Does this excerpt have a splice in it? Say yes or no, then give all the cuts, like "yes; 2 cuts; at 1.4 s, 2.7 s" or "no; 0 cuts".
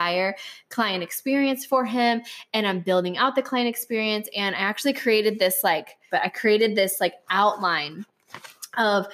yes; 1 cut; at 6.1 s